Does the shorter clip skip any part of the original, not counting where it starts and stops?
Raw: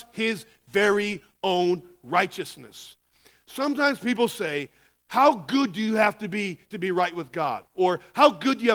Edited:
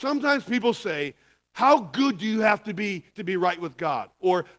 no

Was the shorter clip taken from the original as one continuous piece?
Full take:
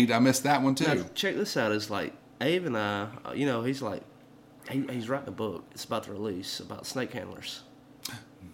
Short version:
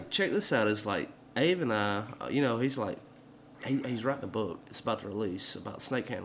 yes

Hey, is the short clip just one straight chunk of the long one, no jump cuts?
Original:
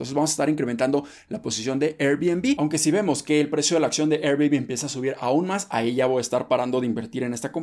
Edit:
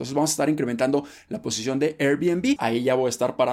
no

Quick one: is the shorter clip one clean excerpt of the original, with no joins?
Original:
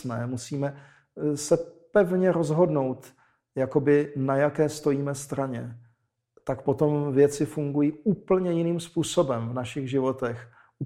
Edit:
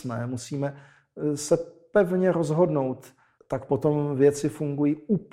no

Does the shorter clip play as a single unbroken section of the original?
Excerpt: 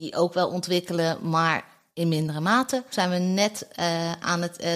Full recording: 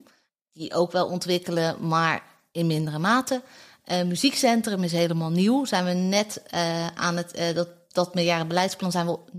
no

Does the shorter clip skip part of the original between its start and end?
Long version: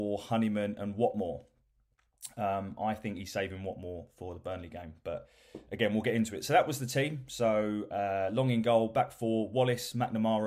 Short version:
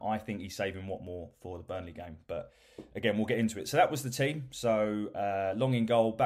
no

